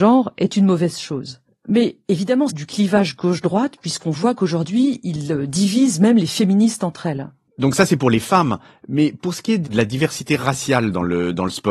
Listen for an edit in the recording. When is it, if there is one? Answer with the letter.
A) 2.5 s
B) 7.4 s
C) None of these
A